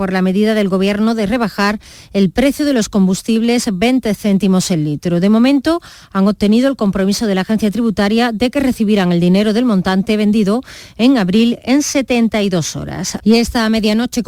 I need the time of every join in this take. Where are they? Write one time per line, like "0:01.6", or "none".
0:13.2